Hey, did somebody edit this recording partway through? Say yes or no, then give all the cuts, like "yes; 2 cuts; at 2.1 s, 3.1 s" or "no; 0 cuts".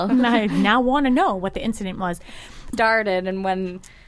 yes; 1 cut; at 2.7 s